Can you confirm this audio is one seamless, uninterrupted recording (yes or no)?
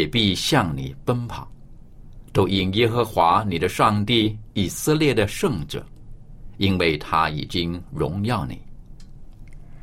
yes